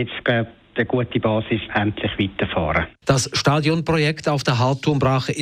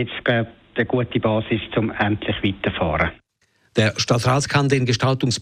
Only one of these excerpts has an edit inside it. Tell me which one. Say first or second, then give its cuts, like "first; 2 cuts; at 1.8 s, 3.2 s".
first; 2 cuts; at 1.7 s, 3.0 s